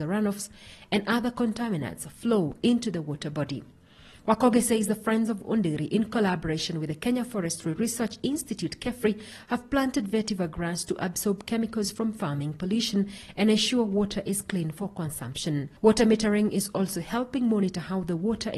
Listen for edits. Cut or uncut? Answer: cut